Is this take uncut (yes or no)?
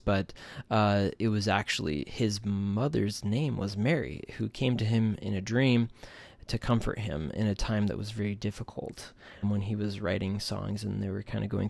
no